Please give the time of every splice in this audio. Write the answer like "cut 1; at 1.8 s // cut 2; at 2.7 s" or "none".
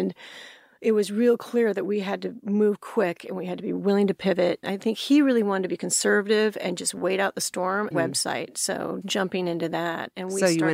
cut 1; at 4.6 s // cut 2; at 7.9 s // cut 3; at 9.0 s